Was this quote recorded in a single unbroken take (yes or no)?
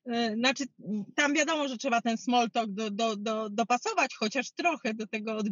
yes